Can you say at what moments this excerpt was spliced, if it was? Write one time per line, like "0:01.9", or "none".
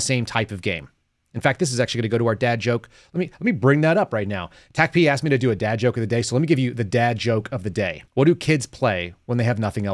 0:08.1